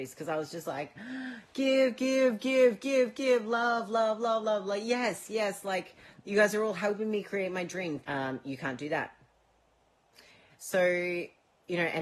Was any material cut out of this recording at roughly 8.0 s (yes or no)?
yes